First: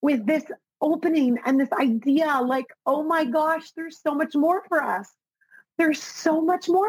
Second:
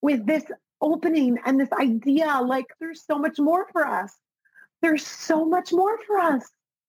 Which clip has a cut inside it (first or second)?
second